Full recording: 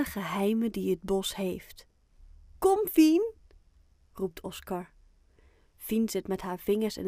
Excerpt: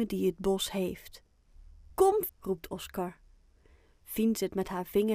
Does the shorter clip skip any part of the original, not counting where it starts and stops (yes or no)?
yes